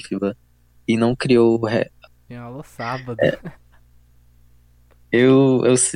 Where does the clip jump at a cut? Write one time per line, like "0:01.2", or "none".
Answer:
0:02.3